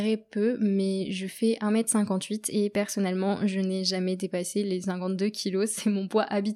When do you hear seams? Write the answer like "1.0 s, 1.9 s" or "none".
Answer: none